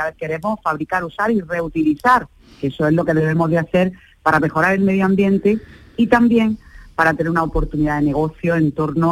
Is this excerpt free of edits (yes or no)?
yes